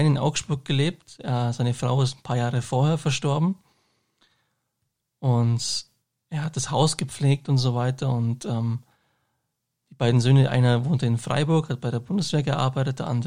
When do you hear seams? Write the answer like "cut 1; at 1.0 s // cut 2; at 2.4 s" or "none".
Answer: none

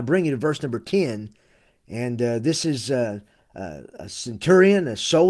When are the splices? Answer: none

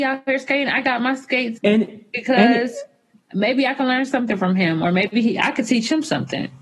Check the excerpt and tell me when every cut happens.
cut 1; at 1.6 s

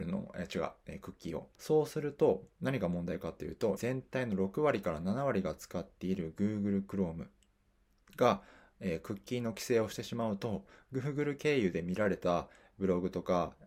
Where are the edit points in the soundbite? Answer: cut 1; at 1.5 s // cut 2; at 3.8 s

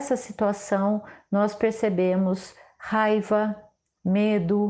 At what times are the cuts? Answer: none

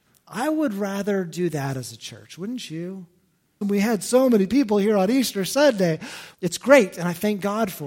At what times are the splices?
cut 1; at 3.6 s // cut 2; at 6.3 s

